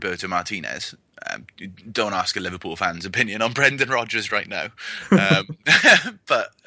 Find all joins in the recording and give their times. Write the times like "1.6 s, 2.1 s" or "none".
none